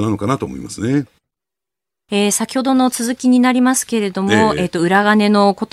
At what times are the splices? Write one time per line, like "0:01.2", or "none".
0:02.1

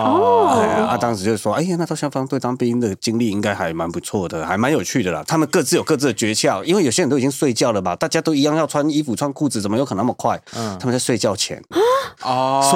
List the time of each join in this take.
0:05.3
0:11.7

